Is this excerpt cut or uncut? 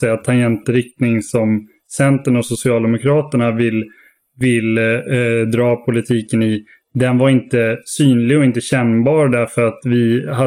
uncut